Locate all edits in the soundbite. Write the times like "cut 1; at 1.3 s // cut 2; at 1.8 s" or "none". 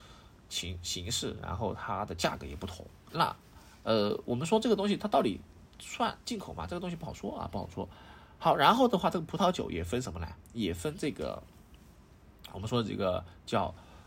cut 1; at 3.1 s